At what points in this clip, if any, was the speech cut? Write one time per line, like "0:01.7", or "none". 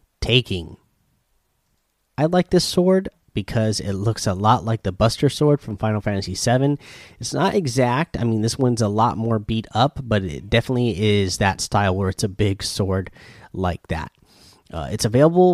none